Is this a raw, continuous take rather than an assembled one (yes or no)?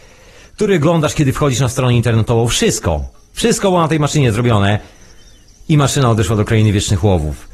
yes